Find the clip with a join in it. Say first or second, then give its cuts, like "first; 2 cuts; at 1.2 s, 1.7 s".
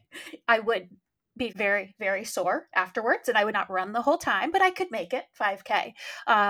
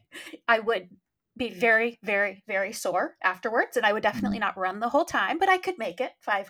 first; 2 cuts; at 1.5 s, 3.5 s